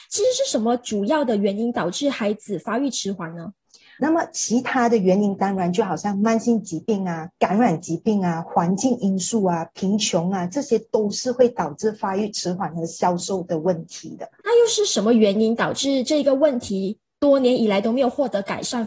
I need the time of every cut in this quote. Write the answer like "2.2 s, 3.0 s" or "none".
4.0 s